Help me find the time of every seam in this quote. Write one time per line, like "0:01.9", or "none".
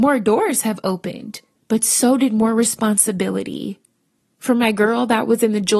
0:01.6